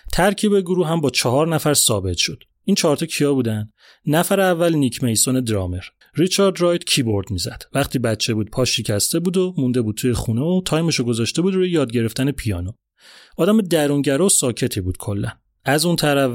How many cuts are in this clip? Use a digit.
1